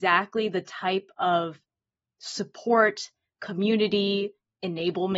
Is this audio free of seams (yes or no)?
yes